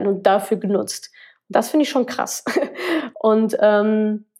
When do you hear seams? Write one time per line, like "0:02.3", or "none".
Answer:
0:03.1